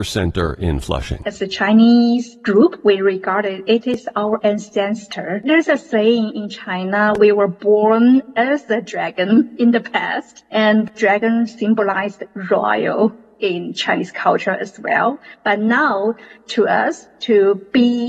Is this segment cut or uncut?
uncut